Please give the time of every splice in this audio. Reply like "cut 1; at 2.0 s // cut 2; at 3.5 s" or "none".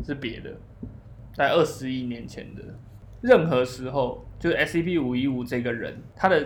cut 1; at 1.4 s